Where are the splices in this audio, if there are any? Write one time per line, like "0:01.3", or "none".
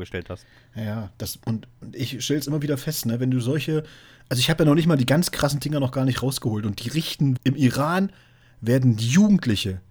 0:07.4